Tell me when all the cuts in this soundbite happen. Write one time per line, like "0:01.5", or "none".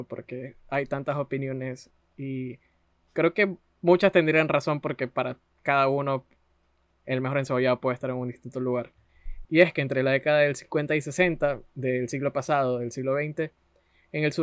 0:09.4